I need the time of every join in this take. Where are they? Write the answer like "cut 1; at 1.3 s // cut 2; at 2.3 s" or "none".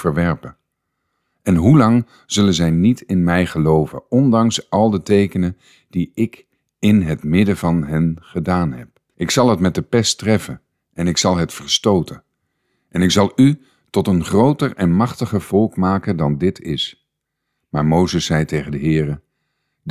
cut 1; at 9.1 s